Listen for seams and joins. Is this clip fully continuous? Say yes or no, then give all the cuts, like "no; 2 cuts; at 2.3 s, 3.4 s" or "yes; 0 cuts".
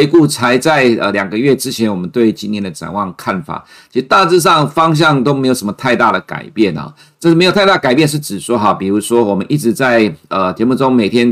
yes; 0 cuts